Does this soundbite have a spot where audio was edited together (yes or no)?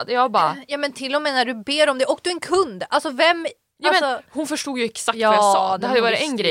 no